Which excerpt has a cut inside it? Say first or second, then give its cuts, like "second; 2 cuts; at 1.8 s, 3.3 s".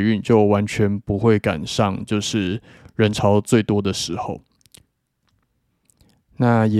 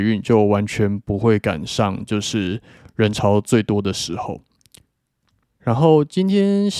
second; 1 cut; at 5.6 s